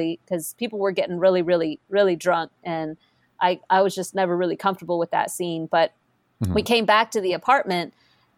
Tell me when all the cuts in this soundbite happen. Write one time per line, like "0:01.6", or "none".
none